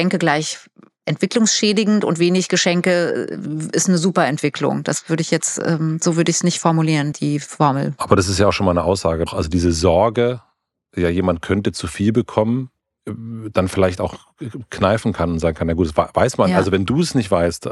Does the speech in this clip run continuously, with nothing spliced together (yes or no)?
no